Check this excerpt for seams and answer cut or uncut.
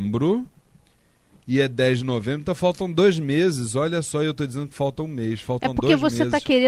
uncut